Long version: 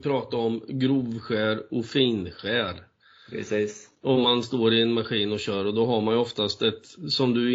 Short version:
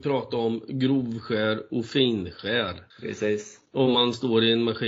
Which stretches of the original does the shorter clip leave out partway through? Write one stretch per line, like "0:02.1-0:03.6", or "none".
0:02.9-0:03.2